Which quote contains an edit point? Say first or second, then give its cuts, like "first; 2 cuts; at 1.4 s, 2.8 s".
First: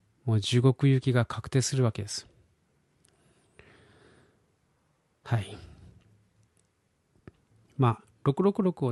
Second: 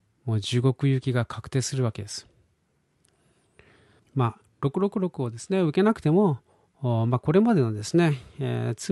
second; 1 cut; at 4.0 s